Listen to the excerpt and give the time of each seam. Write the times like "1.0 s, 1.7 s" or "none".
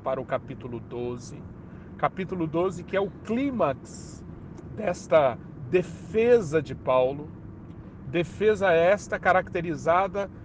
none